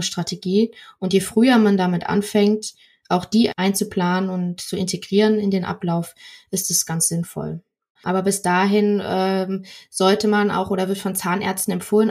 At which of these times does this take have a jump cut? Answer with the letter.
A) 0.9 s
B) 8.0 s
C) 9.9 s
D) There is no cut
B